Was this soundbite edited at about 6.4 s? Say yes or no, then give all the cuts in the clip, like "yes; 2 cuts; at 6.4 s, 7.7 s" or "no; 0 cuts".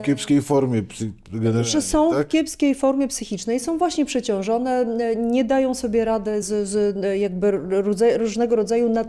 yes; 1 cut; at 6.4 s